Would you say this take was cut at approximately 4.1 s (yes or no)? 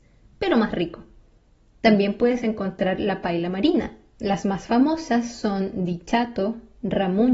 yes